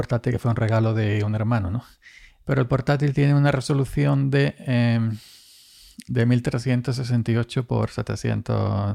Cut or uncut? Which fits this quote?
uncut